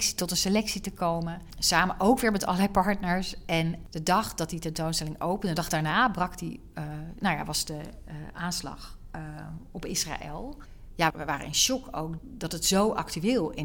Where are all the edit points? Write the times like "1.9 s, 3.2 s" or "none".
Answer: 11.1 s, 12.2 s